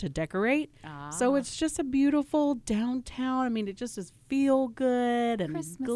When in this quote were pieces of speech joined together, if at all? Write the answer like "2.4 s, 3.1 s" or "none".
none